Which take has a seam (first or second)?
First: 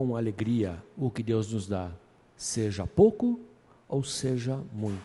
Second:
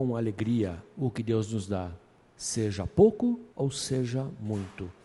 second